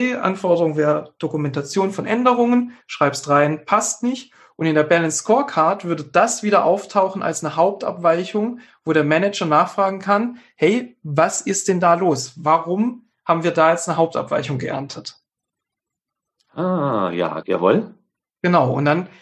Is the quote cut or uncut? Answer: cut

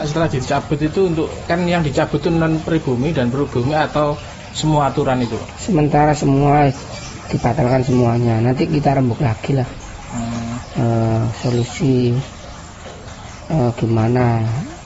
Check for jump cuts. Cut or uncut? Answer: cut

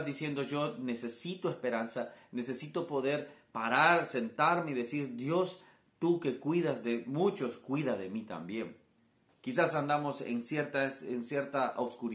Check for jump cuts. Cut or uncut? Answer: cut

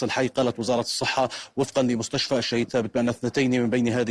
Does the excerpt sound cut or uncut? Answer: cut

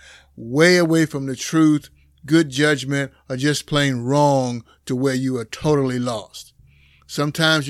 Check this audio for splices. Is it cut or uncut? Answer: uncut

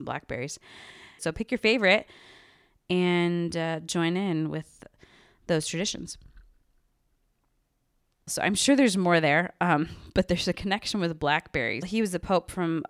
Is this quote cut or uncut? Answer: cut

